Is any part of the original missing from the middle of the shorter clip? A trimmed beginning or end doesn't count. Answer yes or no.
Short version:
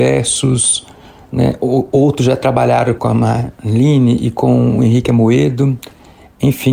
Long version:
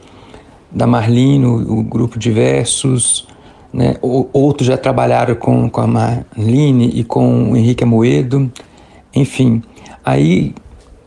yes